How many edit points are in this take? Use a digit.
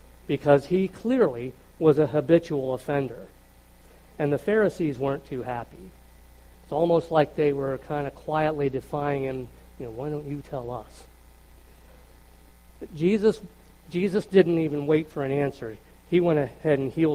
1